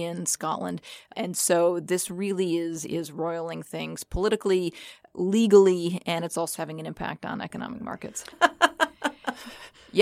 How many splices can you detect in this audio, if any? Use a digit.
2